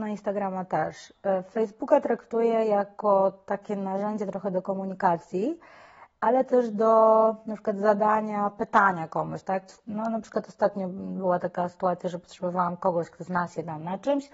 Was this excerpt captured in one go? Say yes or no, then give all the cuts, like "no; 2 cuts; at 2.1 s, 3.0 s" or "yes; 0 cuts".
yes; 0 cuts